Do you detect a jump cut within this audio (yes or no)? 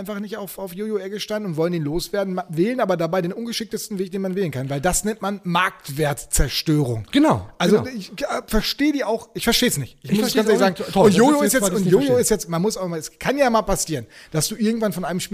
no